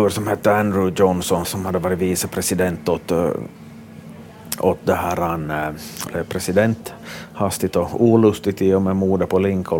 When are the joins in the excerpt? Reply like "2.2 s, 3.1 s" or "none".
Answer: 1.4 s, 6.1 s